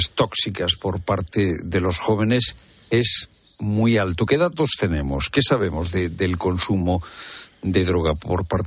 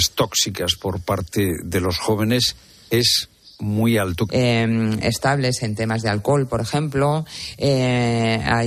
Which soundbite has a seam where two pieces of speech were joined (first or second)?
second